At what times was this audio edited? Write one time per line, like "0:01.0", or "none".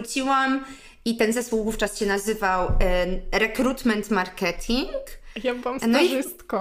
none